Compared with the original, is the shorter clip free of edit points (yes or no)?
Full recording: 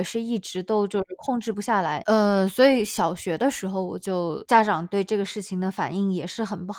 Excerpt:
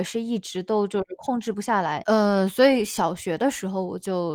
yes